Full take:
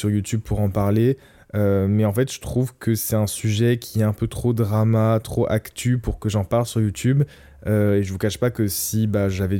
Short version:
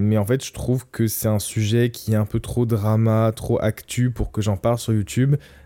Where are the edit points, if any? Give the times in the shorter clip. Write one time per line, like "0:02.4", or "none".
none